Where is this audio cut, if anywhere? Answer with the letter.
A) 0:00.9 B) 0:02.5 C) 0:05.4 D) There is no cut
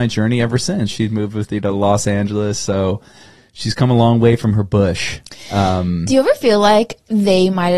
A